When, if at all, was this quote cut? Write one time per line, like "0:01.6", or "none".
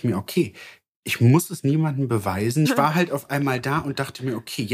0:01.0
0:02.7